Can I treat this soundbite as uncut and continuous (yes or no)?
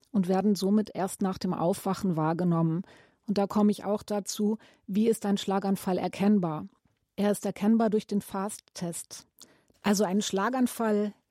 no